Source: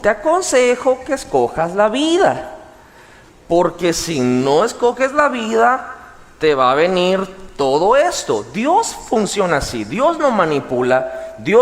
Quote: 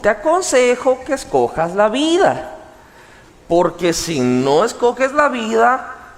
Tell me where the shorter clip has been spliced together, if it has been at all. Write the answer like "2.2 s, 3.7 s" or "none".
none